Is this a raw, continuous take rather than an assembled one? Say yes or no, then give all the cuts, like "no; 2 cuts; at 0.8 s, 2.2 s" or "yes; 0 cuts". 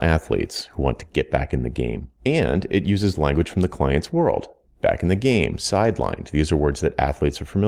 no; 1 cut; at 2.2 s